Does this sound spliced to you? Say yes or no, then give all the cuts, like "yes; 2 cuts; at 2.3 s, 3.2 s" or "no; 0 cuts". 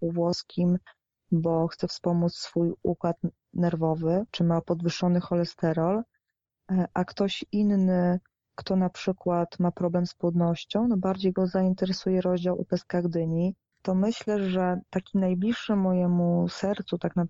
yes; 1 cut; at 13.7 s